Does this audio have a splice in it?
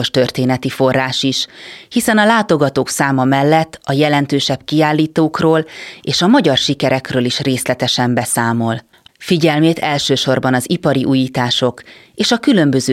yes; 1 cut; at 9.1 s

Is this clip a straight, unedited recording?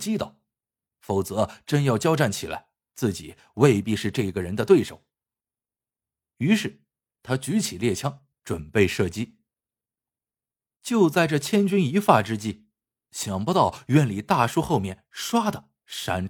yes; 0 cuts

